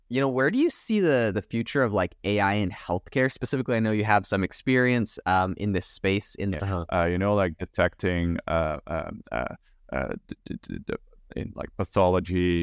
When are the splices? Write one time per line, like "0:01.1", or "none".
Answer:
0:06.6
0:11.3